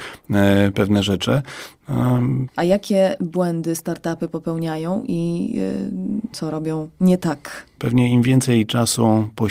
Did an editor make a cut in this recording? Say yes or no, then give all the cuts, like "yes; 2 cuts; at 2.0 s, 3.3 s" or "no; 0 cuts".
yes; 3 cuts; at 2.5 s, 6.3 s, 7.8 s